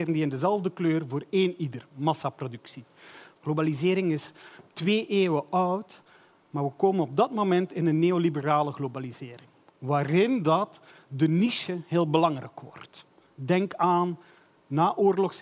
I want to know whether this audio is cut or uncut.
cut